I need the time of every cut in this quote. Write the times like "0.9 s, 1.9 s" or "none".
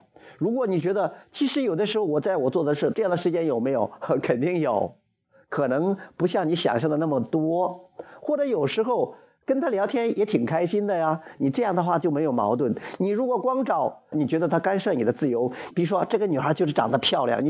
2.9 s, 14.1 s, 15.7 s